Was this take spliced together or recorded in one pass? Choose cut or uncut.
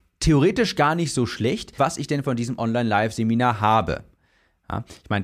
cut